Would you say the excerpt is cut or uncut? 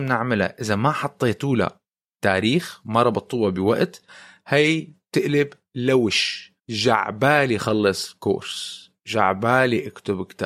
cut